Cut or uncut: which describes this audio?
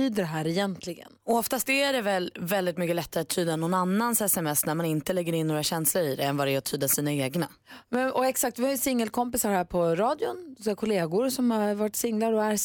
uncut